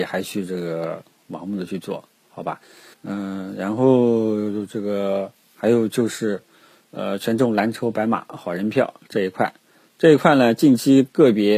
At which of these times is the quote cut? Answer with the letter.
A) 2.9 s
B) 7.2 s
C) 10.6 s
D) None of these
A